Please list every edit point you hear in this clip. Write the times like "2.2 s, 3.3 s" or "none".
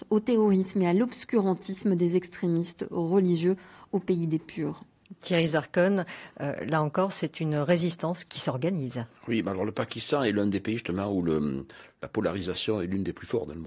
9.2 s